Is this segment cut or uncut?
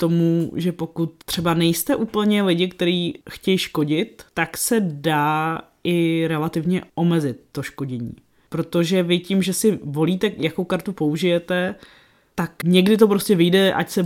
uncut